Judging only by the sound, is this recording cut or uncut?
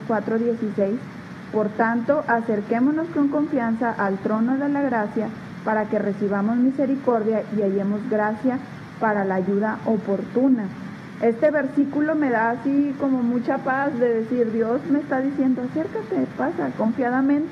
cut